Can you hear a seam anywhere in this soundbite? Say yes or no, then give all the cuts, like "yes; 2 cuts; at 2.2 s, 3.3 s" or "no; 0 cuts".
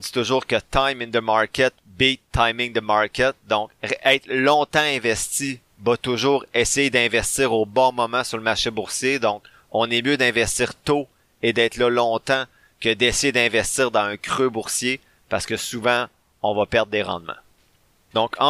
no; 0 cuts